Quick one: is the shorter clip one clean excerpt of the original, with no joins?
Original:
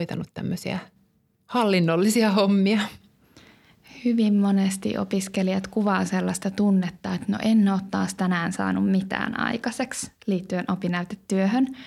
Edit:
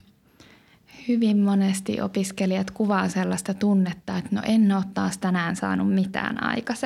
yes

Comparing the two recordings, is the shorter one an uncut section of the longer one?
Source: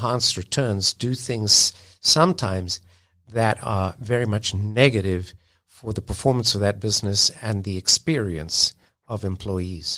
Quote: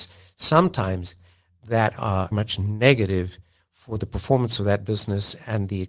no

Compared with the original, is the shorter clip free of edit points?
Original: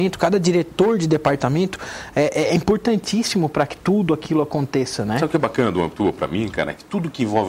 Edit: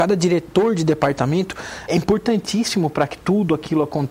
no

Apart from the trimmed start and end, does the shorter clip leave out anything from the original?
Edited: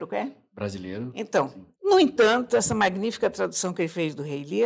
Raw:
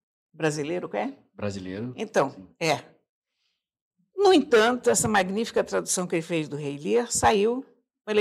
yes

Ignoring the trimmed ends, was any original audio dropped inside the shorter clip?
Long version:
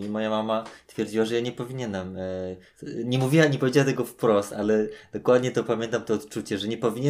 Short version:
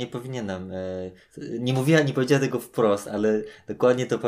no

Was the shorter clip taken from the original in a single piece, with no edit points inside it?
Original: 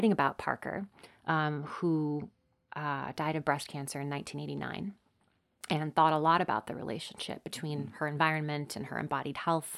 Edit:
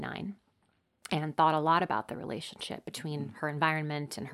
yes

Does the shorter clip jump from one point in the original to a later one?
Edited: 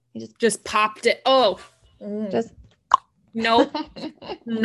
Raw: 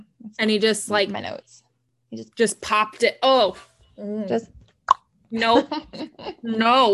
no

